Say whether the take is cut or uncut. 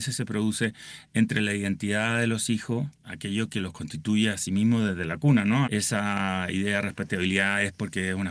cut